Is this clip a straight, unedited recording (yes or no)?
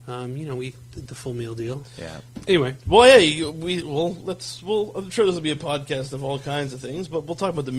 no